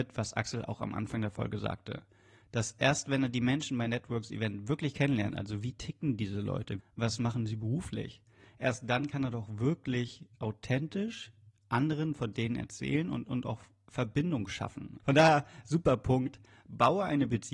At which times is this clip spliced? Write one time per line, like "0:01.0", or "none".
0:06.8
0:15.0

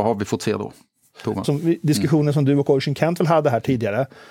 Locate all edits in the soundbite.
0:01.4

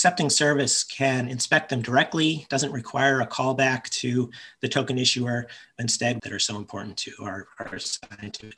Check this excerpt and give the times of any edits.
0:06.2

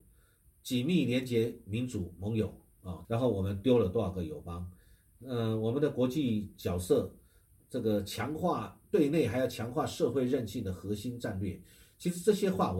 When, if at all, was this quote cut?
0:03.0

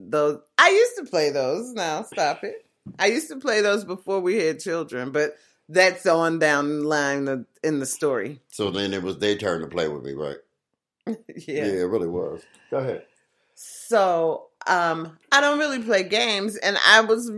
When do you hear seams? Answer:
none

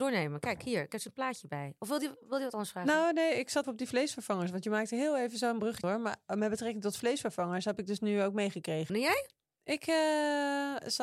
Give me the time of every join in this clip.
0:03.6
0:05.8
0:08.9

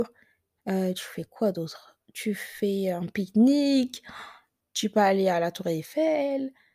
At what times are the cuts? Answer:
none

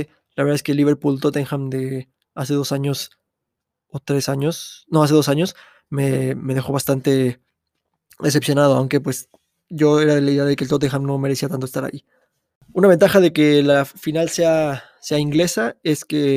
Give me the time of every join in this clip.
none

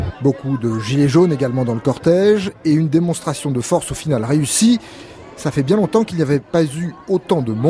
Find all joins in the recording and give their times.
none

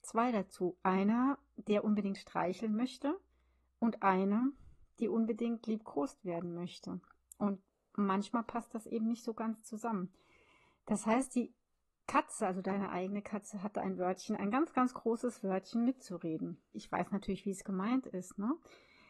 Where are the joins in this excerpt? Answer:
0:16.7

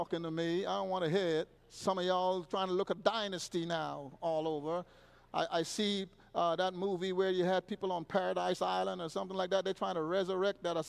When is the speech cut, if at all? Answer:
0:01.6

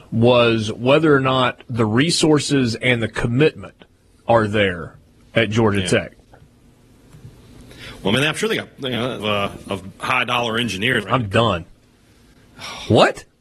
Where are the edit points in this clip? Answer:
0:09.2
0:11.0

